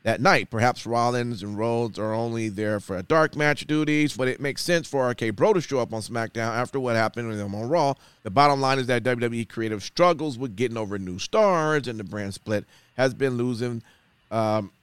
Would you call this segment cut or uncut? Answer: cut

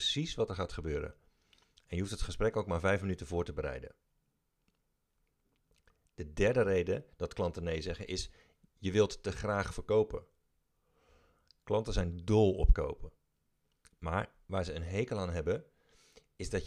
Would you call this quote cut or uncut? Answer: uncut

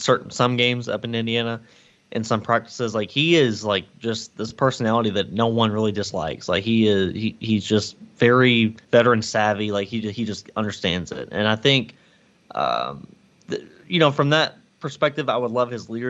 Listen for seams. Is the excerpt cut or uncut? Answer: cut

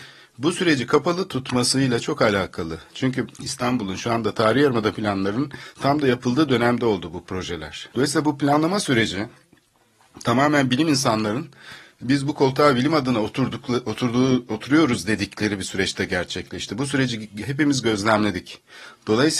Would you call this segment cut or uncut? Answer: cut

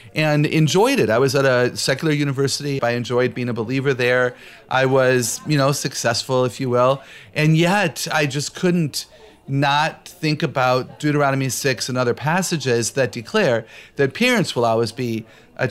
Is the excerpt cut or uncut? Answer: cut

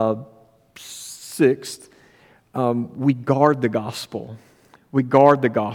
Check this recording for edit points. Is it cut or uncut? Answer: uncut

